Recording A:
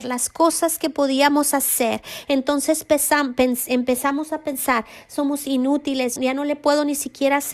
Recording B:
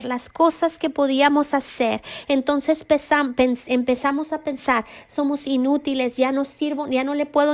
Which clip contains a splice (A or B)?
A